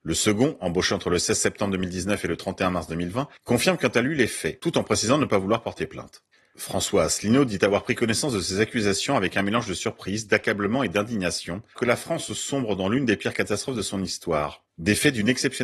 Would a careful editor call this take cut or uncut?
cut